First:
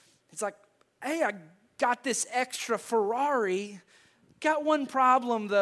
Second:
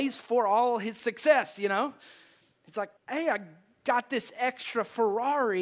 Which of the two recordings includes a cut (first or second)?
second